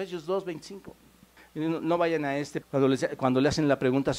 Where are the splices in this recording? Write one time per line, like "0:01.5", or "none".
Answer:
0:01.4
0:02.6